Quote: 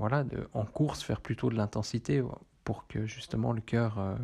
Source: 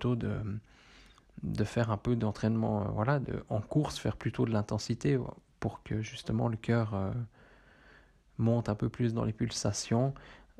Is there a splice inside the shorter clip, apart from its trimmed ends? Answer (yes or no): no